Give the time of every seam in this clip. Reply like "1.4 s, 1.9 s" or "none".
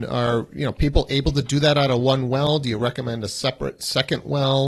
none